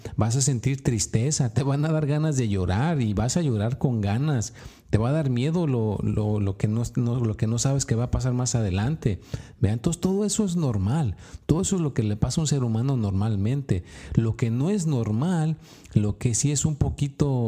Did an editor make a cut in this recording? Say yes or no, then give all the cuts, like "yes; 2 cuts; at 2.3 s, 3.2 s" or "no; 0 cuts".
no; 0 cuts